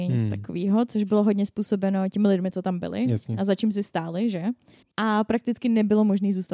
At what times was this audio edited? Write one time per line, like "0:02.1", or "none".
0:04.8